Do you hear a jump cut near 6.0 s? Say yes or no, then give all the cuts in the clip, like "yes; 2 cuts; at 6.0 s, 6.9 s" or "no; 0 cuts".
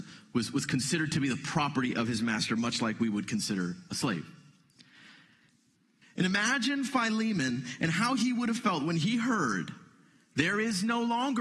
yes; 1 cut; at 6.0 s